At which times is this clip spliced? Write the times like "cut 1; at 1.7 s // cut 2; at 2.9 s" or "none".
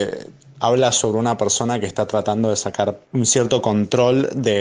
cut 1; at 3.0 s